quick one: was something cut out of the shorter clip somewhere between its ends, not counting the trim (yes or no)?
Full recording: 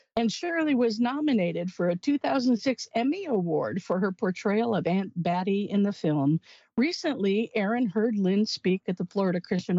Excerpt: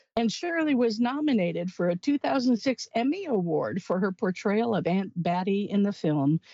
no